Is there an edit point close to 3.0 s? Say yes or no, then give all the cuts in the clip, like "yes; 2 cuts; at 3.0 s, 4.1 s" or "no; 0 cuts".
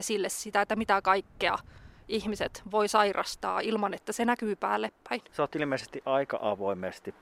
no; 1 cut; at 5.3 s